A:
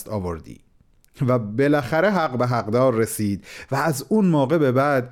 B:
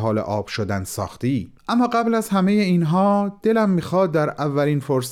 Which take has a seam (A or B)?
B